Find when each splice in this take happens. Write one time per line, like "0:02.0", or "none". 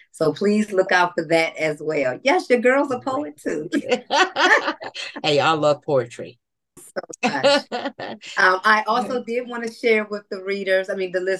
0:06.8